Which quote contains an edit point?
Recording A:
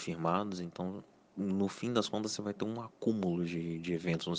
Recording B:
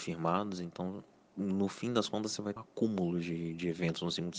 B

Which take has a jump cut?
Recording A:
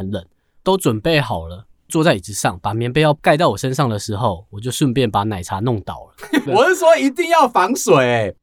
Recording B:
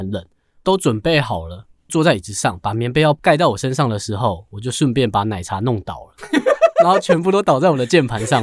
A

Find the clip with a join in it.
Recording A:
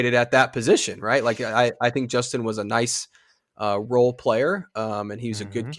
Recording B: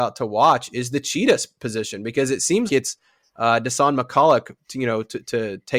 B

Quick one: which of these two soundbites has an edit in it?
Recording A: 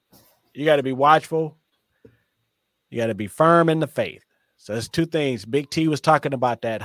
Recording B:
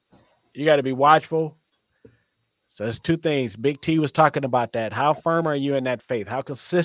B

